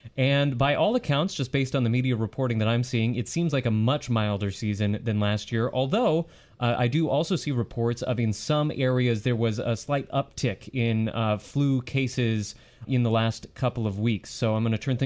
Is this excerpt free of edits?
yes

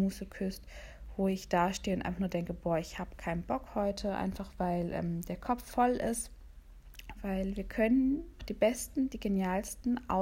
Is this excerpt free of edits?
no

